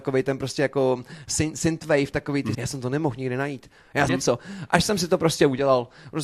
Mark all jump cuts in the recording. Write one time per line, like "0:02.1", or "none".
0:02.5
0:04.1